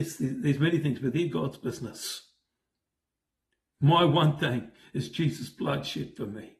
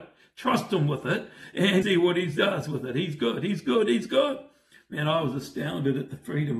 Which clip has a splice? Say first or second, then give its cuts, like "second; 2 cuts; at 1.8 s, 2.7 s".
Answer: second; 1 cut; at 1.8 s